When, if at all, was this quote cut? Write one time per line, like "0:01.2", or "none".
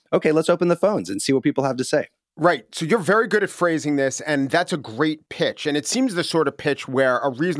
none